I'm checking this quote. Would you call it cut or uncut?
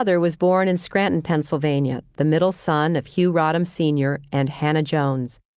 uncut